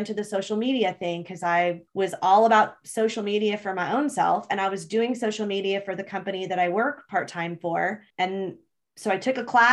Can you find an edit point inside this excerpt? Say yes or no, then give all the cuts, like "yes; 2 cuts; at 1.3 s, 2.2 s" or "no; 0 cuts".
yes; 2 cuts; at 1.9 s, 8.1 s